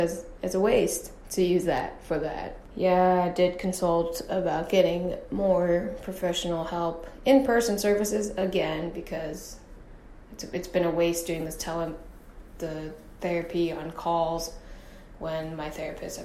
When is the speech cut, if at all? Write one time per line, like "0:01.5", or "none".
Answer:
0:02.7